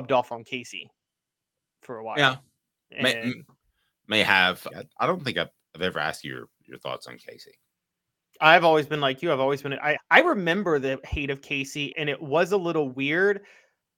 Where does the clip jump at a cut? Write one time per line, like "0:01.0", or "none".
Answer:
0:04.7
0:10.0
0:11.9